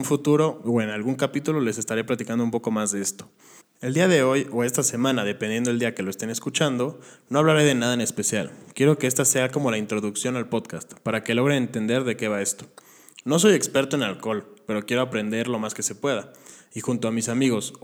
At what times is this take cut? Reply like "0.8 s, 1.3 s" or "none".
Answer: 3.6 s